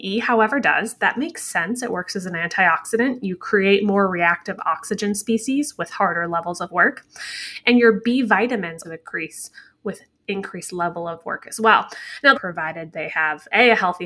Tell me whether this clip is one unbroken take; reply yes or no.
no